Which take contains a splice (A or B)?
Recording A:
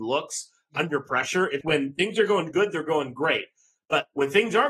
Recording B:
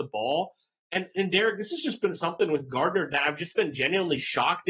A